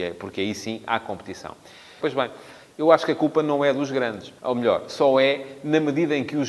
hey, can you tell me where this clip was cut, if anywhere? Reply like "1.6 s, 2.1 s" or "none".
2.0 s, 4.4 s